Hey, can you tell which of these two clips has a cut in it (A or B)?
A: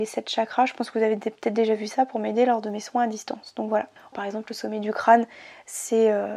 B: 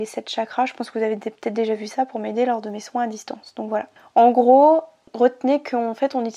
A